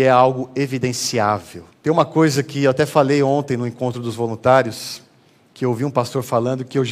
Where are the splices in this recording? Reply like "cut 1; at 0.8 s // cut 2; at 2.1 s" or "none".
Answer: cut 1; at 1.7 s